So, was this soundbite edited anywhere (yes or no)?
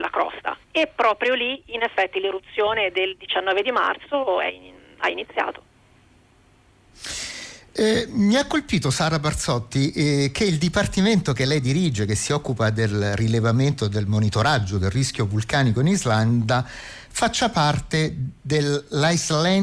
no